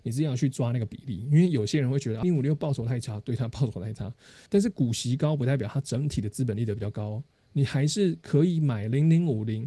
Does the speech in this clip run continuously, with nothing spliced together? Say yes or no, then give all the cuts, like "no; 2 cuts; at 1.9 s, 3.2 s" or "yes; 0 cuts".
no; 2 cuts; at 2.2 s, 4.5 s